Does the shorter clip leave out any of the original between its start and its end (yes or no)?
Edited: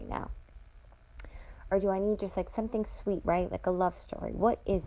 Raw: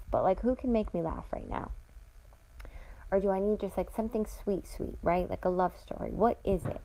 yes